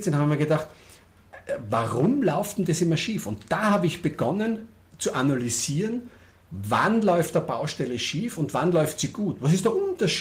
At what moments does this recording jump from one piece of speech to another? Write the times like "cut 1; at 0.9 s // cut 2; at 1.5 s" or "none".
none